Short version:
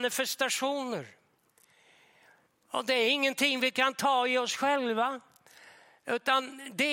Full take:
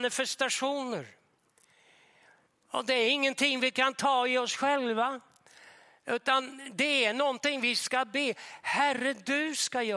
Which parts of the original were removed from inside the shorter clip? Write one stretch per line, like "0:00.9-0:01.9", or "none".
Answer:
none